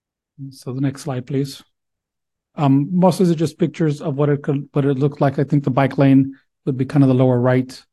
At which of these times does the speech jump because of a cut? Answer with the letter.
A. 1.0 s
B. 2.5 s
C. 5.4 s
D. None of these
B